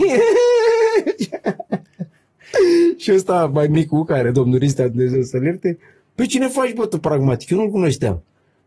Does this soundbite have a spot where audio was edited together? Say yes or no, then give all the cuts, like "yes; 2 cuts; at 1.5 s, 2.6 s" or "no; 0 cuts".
no; 0 cuts